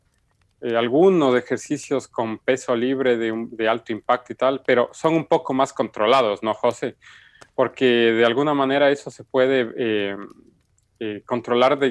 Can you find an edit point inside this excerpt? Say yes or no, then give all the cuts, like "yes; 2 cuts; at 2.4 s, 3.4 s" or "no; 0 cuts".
no; 0 cuts